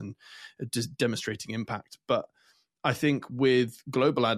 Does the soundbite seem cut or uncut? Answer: uncut